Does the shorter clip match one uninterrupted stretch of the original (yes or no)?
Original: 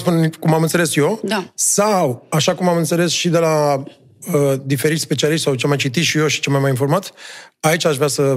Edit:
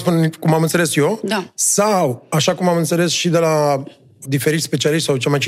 no